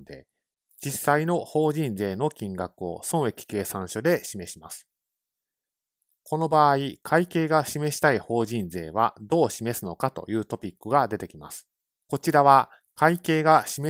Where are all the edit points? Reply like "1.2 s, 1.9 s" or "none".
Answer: 11.9 s

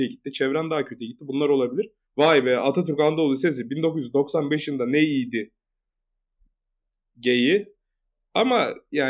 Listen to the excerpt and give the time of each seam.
2.0 s

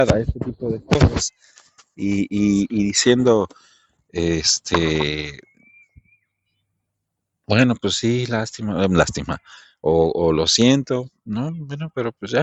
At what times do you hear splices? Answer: none

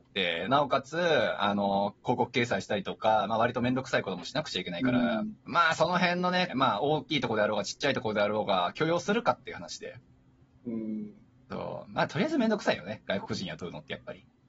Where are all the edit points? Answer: 5.4 s, 6.5 s

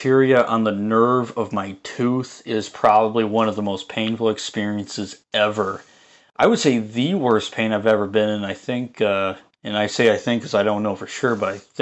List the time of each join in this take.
none

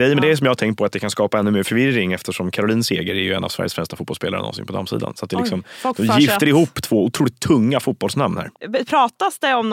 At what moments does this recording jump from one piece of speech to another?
8.5 s

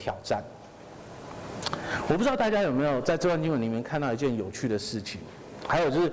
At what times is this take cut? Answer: none

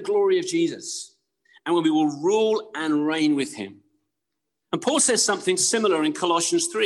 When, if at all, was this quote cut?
4.6 s

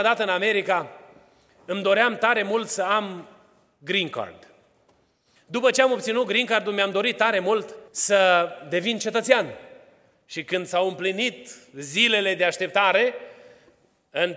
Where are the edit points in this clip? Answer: 5.4 s, 7.9 s

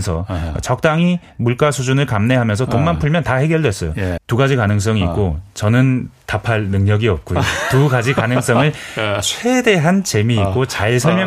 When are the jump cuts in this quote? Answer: 4.2 s

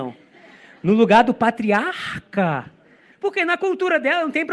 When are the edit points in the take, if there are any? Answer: 3.1 s

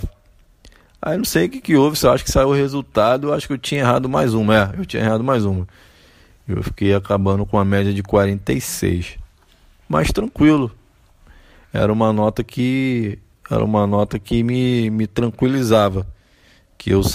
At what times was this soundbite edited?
none

